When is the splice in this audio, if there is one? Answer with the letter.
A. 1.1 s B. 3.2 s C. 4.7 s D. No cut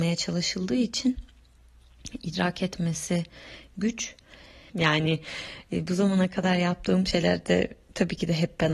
C